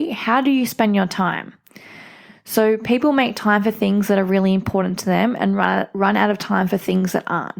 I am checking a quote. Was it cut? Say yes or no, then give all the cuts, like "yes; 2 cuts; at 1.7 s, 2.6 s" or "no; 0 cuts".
no; 0 cuts